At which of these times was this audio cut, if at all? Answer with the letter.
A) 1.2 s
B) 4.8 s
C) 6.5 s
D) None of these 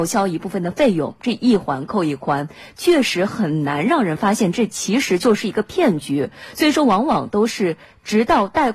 D